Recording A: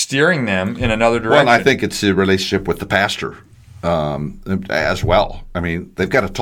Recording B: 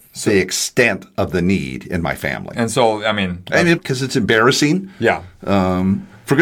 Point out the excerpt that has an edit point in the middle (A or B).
B